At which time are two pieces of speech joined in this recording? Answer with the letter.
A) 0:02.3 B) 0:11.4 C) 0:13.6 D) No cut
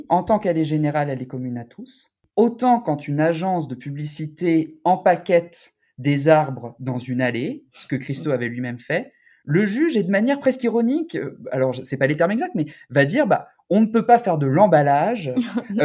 A